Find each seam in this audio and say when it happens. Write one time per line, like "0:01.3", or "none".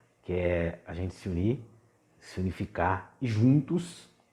none

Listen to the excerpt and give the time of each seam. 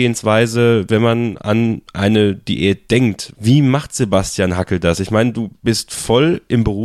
0:03.3

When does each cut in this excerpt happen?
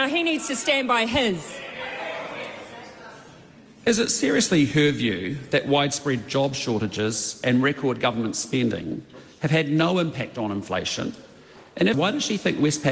0:11.9

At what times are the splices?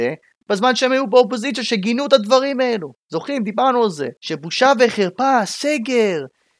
0:04.2

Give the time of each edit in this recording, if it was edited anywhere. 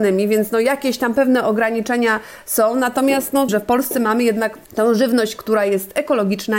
0:03.5
0:04.6

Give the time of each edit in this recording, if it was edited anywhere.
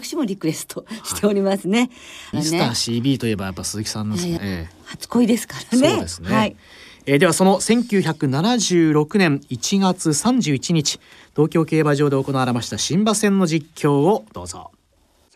0:02.3
0:04.4

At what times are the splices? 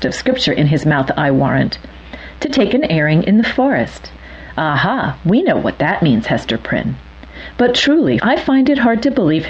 0:08.2

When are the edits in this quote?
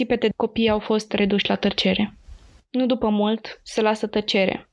0:02.6

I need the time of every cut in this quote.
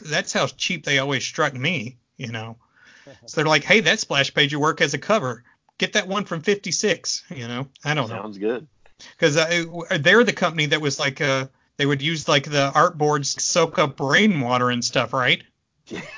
0:07.7
0:13.4

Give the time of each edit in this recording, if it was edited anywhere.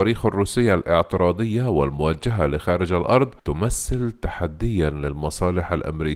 0:03.4

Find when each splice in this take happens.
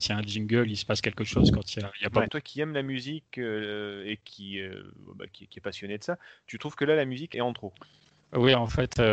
0:02.3
0:07.3

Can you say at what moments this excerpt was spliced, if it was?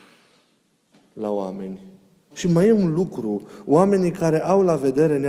0:02.3

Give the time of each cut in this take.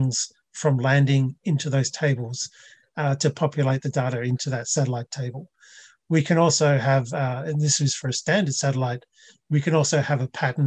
0:02.8

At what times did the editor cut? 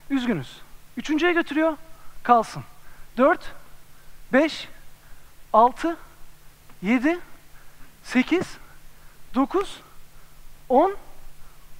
none

